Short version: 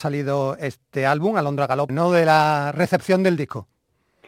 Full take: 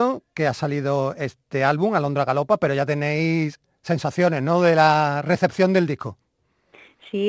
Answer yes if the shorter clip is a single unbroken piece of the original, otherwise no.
no